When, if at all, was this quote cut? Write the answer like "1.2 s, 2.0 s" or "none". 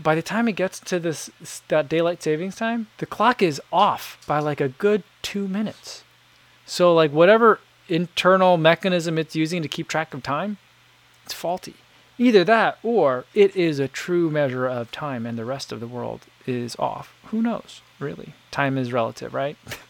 2.9 s

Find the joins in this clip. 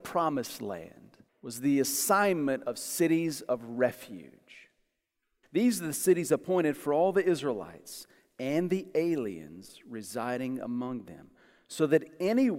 1.3 s, 5.4 s

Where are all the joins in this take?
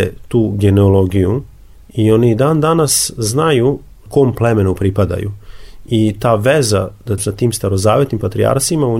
7.2 s

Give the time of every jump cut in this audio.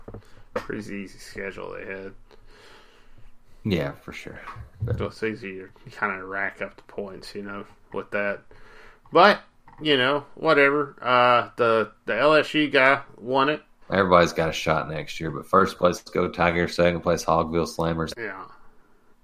13.8 s, 18.1 s

